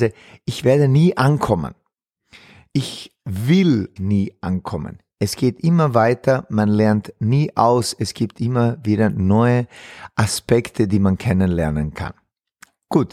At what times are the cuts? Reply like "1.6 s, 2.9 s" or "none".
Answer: 4.0 s

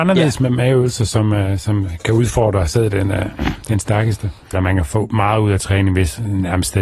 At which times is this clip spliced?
4.5 s

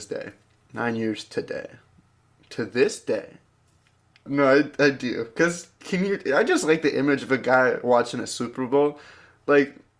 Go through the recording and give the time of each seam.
4.3 s

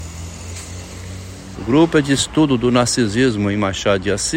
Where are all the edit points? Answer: 1.5 s

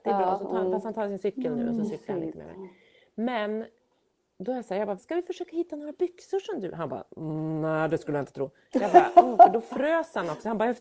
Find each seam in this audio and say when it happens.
5.0 s

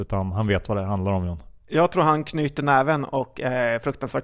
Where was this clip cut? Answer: none

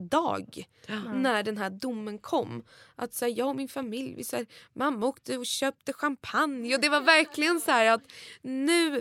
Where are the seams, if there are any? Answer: none

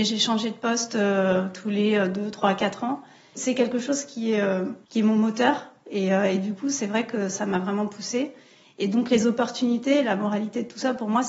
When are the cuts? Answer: 3.4 s, 4.8 s

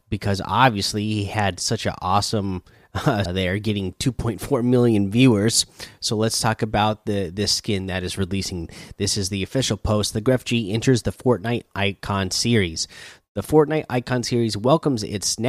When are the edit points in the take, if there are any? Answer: 3.2 s

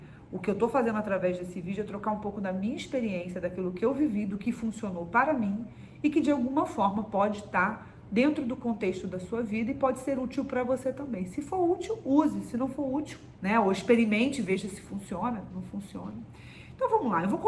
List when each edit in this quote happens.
13.4 s

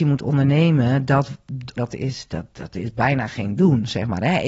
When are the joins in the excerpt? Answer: 1.8 s

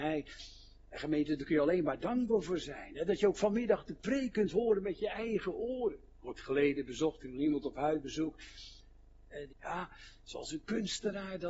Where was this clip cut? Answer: 6.1 s, 9.5 s

